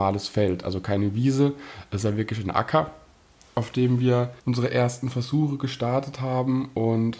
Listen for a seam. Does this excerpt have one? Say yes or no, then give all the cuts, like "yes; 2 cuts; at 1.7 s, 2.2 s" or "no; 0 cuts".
yes; 1 cut; at 4.4 s